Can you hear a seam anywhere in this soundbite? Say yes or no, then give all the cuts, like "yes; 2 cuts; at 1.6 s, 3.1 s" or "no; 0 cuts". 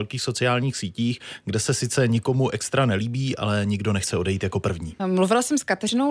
yes; 1 cut; at 5.0 s